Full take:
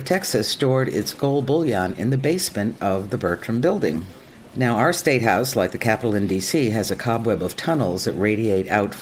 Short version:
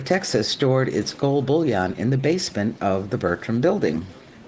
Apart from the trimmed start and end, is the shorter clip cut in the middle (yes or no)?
no